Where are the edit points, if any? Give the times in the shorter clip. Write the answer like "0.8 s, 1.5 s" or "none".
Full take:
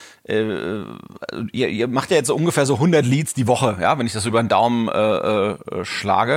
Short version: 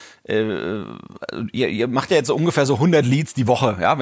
none